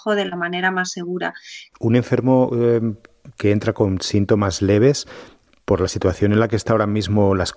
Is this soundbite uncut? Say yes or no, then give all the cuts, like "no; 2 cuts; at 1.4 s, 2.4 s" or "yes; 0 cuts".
no; 1 cut; at 1.7 s